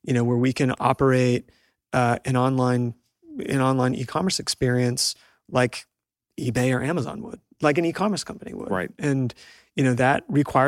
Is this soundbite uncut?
yes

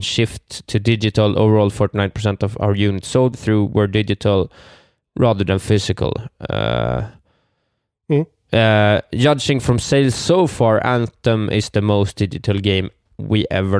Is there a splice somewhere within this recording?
no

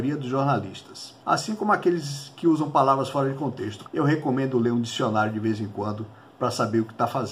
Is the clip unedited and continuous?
no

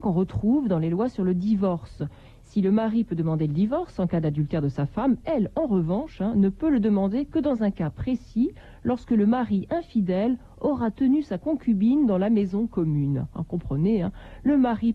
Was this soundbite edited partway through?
no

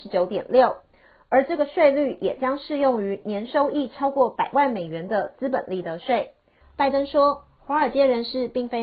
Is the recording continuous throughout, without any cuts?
no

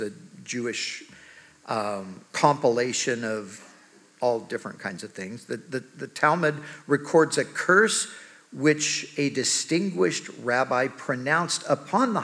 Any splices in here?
no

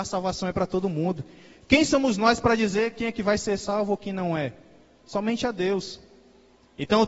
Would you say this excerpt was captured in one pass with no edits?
yes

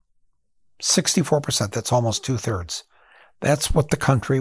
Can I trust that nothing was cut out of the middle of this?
yes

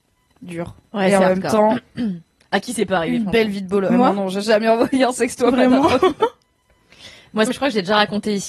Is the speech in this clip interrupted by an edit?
yes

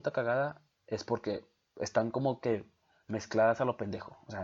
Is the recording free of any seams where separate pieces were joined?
yes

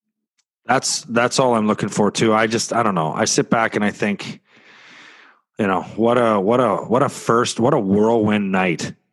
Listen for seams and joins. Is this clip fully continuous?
yes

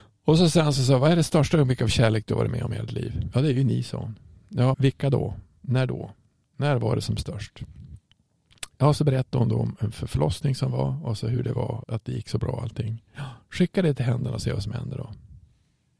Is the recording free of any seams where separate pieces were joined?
no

